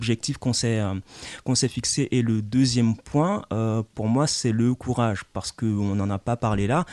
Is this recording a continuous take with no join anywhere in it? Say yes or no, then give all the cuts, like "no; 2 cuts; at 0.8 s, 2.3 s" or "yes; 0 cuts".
yes; 0 cuts